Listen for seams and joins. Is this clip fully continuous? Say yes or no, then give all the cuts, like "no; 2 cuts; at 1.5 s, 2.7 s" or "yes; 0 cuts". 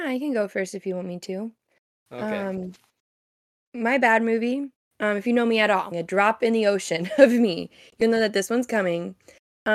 no; 2 cuts; at 4.8 s, 5.9 s